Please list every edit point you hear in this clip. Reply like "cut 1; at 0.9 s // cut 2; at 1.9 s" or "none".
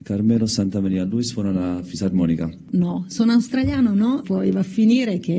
cut 1; at 2.7 s // cut 2; at 4.2 s